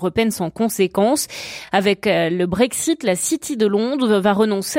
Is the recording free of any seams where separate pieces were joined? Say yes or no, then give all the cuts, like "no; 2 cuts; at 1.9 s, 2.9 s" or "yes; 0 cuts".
yes; 0 cuts